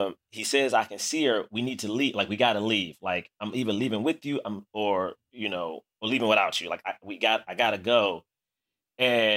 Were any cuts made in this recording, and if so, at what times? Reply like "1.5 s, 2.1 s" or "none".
none